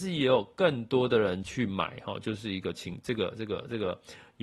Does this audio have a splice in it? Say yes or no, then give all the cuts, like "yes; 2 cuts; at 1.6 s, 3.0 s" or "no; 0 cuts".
no; 0 cuts